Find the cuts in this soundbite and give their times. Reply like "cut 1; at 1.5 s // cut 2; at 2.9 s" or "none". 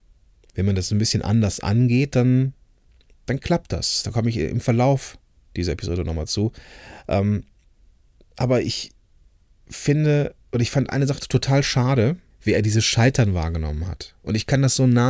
cut 1; at 10.4 s // cut 2; at 12.3 s